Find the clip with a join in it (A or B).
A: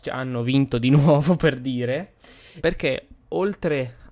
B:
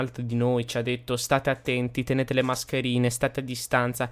A